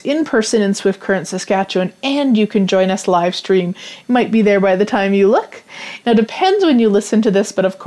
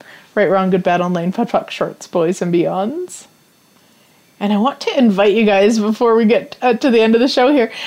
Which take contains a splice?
first; 2 cuts; at 4.0 s, 6.0 s

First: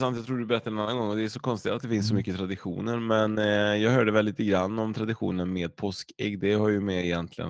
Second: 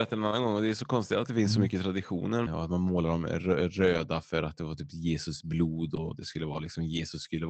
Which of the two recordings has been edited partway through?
second; 1 cut; at 2.5 s

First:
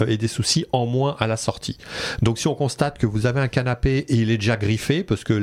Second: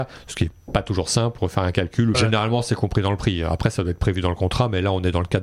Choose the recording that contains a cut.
second; 1 cut; at 2.1 s

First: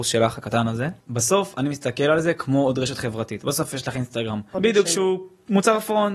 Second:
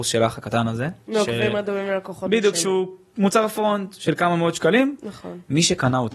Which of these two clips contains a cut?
first; 2 cuts; at 1.0 s, 4.5 s

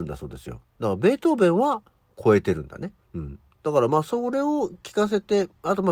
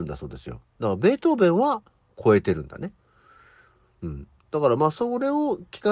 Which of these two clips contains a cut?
first; 1 cut; at 3.0 s

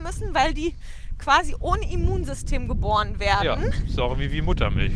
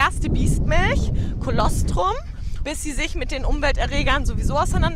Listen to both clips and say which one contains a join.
second; 1 cut; at 2.6 s

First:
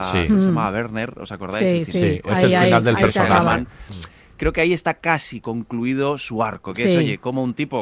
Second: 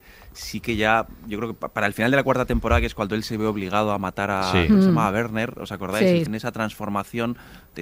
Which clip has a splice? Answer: second; 1 cut; at 6.3 s

